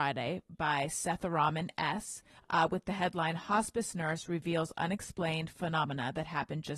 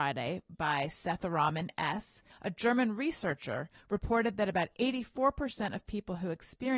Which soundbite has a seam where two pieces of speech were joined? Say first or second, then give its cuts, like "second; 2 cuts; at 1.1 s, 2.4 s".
second; 2 cuts; at 2.3 s, 3.7 s